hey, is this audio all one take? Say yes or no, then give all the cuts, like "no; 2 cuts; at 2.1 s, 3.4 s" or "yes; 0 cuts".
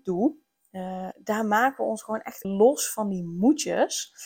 no; 2 cuts; at 1.1 s, 2.4 s